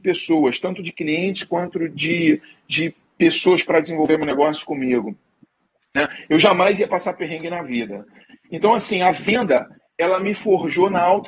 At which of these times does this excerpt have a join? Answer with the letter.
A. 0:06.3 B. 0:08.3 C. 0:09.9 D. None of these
D